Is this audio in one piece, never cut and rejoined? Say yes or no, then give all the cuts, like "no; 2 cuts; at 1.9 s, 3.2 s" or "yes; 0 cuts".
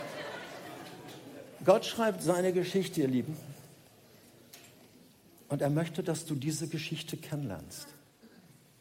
yes; 0 cuts